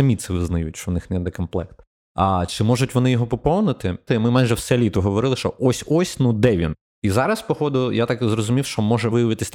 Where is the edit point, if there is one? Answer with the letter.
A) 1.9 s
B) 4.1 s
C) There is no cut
B